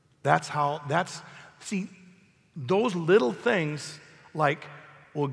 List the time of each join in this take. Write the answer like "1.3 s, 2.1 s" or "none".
none